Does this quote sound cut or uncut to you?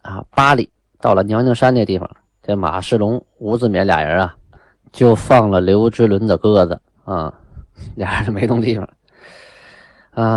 uncut